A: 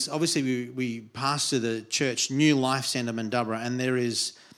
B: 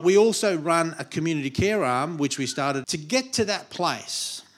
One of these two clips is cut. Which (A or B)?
B